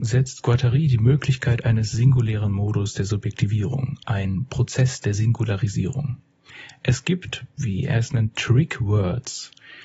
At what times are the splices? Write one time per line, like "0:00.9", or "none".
none